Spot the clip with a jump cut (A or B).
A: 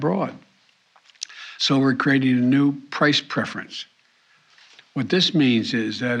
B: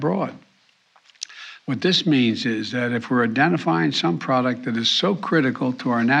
B